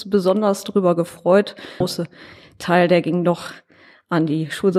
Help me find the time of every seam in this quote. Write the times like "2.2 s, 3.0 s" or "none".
1.8 s

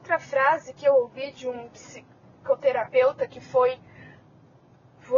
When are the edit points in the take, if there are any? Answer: none

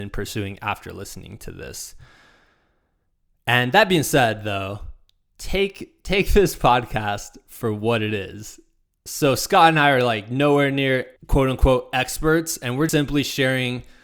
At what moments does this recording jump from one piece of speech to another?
9.1 s, 11.2 s, 12.9 s

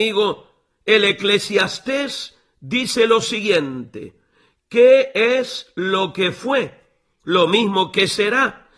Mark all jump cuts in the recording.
none

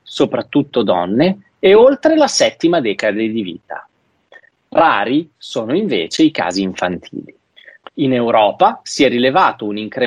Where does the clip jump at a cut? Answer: 7.9 s

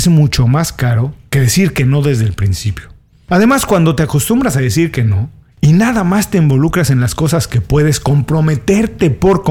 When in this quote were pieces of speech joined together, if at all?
none

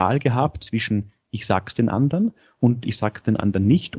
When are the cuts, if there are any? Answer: none

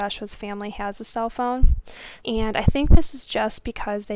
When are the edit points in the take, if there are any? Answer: 2.2 s

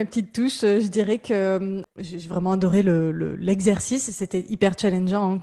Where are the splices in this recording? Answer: none

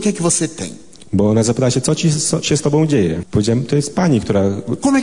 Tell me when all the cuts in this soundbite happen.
3.2 s

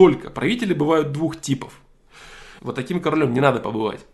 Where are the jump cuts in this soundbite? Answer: 2.6 s

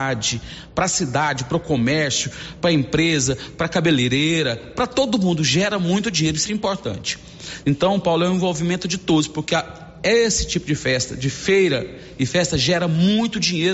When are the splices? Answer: 6.5 s, 7.6 s

